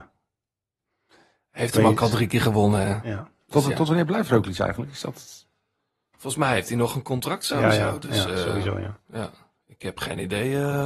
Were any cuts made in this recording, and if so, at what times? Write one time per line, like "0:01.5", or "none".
none